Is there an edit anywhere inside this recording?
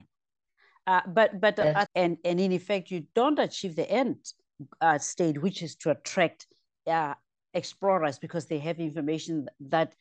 yes; 1 cut; at 1.9 s

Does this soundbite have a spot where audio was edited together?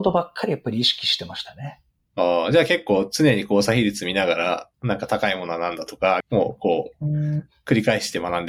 yes; 2 cuts; at 4.7 s, 6.2 s

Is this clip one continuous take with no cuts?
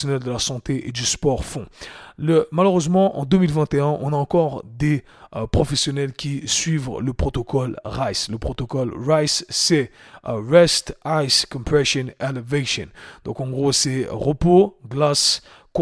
yes; 0 cuts

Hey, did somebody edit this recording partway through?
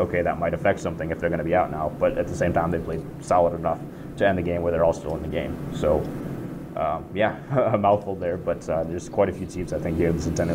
no; 0 cuts

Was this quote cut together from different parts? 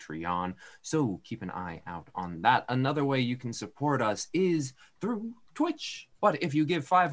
yes; 1 cut; at 6.1 s

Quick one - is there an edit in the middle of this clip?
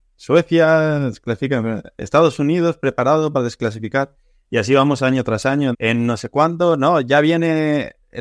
yes; 1 cut; at 5.7 s

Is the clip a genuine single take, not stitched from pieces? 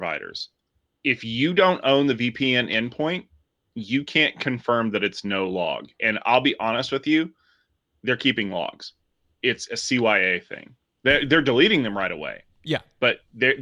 yes; 0 cuts

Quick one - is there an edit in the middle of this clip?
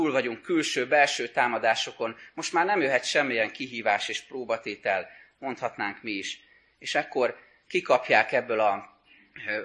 no; 0 cuts

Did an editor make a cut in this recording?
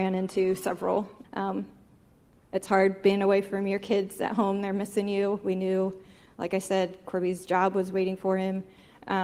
yes; 1 cut; at 1.2 s

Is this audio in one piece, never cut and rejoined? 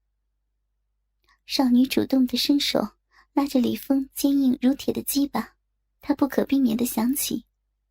no; 1 cut; at 6.0 s

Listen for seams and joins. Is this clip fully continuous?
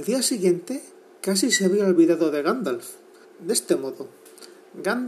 no; 1 cut; at 3.2 s

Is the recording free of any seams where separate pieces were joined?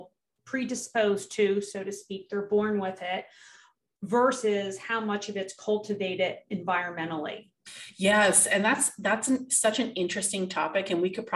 yes; 0 cuts

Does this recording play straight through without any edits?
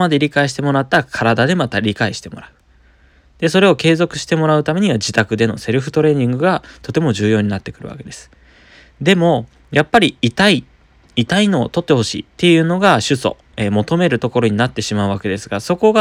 no; 2 cuts; at 12.3 s, 13.5 s

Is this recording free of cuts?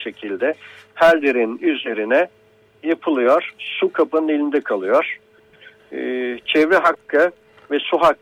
yes; 0 cuts

